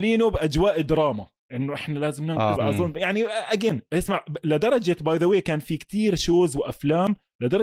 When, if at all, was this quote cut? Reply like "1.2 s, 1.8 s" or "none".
2.6 s